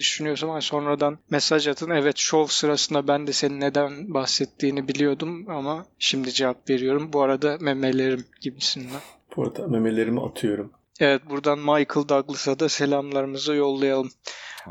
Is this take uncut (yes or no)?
yes